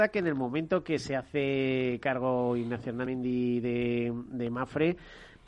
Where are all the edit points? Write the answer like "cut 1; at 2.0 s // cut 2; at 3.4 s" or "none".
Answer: cut 1; at 3.1 s